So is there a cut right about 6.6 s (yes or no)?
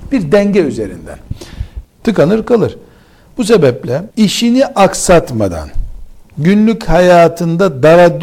no